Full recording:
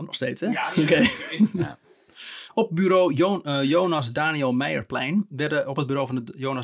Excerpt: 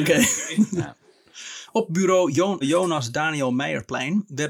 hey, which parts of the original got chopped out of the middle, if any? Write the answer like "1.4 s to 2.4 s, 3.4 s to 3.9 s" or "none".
3.4 s to 3.6 s